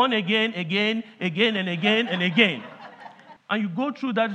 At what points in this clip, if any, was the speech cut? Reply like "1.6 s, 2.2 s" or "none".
3.4 s